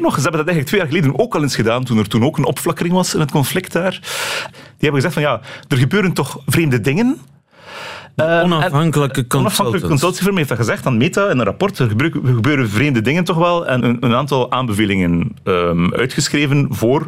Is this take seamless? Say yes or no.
no